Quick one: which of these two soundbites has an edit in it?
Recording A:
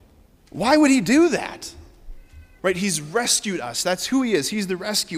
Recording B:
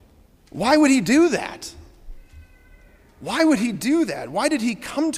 A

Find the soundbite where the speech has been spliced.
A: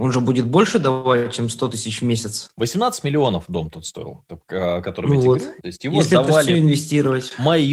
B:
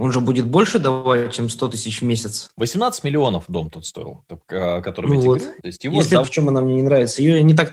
B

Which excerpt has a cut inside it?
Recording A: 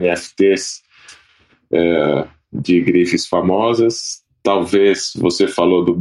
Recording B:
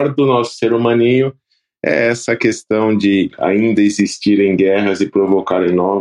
B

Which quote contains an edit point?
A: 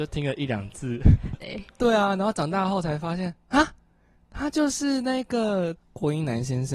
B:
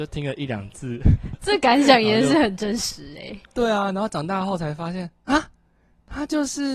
A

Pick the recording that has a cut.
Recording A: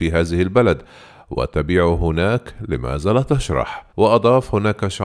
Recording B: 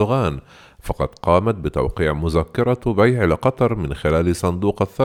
A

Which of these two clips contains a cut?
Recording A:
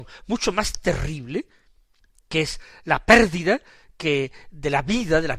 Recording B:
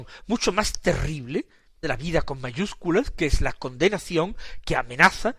B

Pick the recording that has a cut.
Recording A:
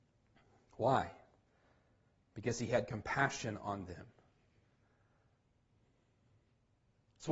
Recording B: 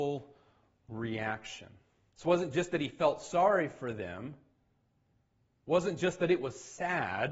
B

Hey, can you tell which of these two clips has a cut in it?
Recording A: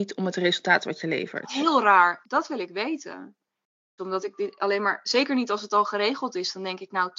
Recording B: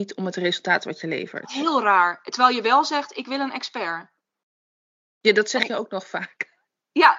A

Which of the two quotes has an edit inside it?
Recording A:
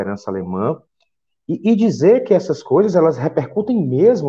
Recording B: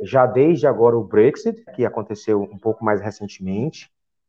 B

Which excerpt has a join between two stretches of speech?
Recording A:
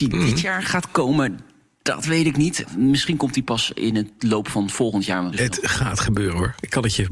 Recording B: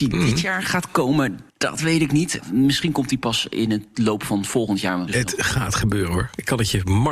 B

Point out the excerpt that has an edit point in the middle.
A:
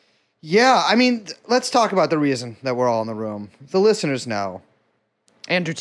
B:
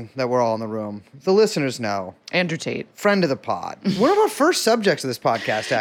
B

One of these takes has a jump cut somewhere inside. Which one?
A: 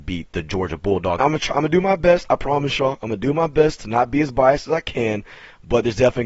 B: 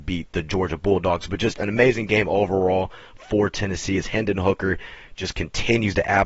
A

